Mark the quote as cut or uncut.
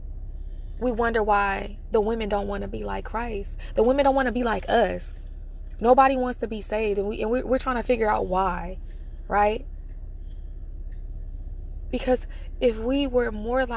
uncut